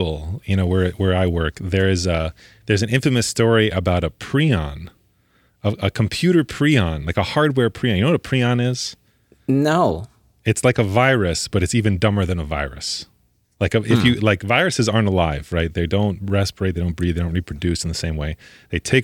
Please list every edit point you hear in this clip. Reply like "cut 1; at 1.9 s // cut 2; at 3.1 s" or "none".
none